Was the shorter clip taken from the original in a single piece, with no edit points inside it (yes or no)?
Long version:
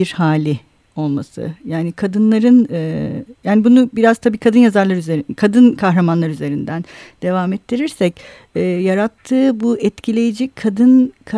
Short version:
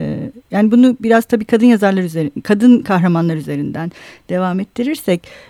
yes